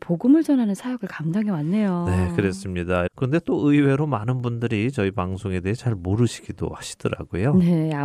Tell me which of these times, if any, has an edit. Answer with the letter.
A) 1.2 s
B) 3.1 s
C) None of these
B